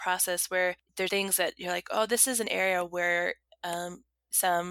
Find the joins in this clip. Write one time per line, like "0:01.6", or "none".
0:01.1